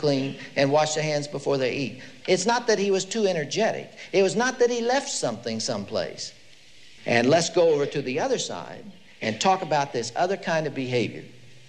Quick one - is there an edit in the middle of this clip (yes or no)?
yes